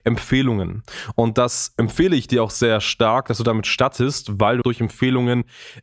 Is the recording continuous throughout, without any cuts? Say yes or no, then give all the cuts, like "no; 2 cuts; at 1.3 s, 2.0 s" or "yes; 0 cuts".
no; 1 cut; at 4.6 s